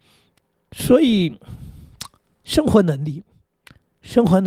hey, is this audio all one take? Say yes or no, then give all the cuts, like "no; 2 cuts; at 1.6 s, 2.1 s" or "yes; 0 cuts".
yes; 0 cuts